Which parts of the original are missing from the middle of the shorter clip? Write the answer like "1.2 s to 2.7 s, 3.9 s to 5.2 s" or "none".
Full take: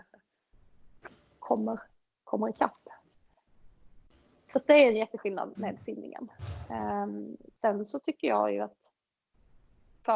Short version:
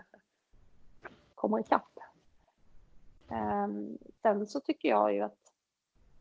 1.3 s to 2.2 s, 4.2 s to 6.7 s